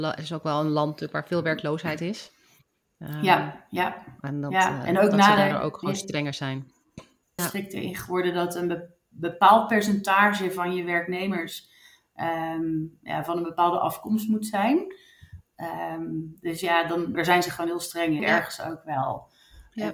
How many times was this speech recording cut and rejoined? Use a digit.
3